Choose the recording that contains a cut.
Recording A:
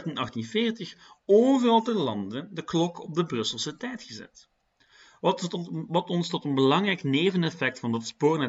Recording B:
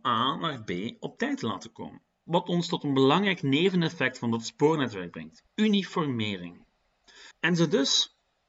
B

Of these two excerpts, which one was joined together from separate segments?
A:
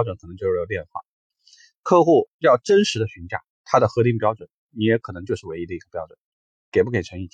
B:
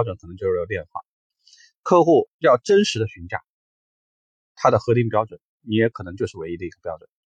A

